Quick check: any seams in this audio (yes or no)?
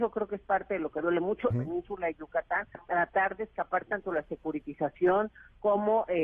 yes